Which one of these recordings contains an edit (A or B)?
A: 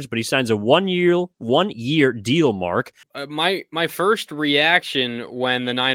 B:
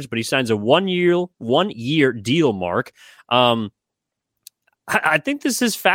A